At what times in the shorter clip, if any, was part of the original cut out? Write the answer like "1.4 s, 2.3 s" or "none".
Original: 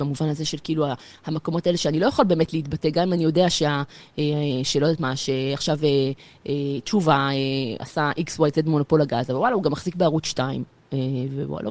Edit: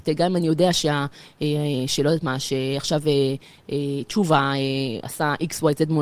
none